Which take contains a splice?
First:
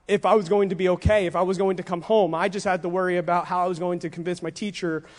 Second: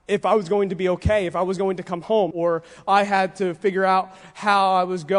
second; 1 cut; at 2.3 s

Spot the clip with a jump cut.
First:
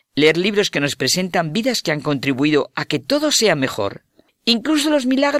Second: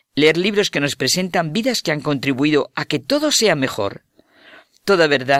first; 1 cut; at 4.3 s

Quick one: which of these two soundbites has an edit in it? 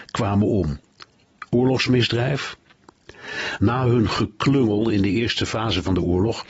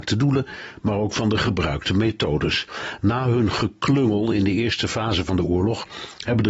first; 1 cut; at 3.6 s

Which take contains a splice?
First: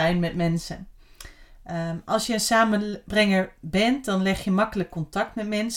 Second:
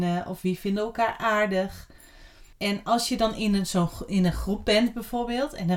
second; 1 cut; at 2.5 s

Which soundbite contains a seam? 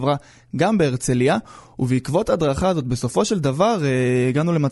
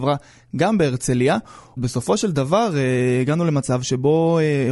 second; 1 cut; at 1.8 s

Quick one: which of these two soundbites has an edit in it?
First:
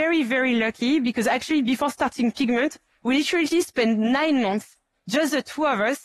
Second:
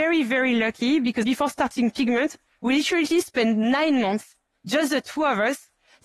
second; 1 cut; at 1.2 s

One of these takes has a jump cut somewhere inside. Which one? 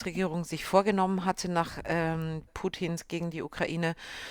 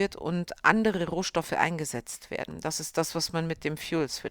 first; 1 cut; at 2.5 s

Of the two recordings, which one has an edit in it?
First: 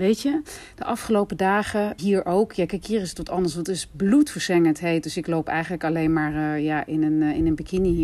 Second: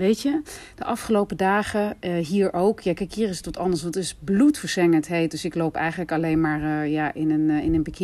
first; 1 cut; at 2.0 s

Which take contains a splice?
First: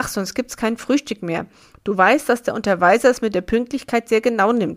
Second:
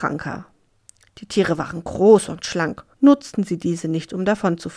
second; 1 cut; at 2.9 s

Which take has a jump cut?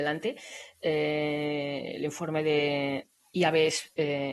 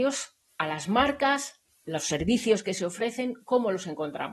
first; 1 cut; at 3.0 s

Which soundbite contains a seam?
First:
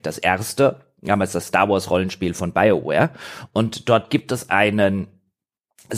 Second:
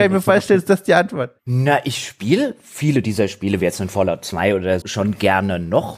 second; 2 cuts; at 1.4 s, 4.8 s

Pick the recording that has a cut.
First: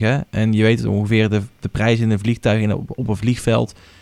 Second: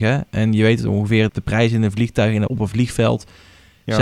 second; 2 cuts; at 1.3 s, 2.5 s

